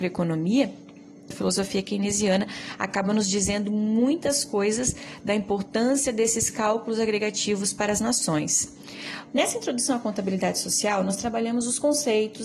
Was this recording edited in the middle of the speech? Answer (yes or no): yes